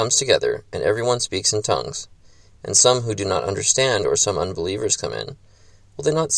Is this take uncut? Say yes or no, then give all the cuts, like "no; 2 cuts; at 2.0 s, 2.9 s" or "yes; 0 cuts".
yes; 0 cuts